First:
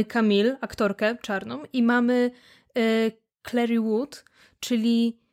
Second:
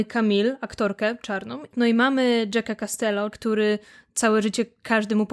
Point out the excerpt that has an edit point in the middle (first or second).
second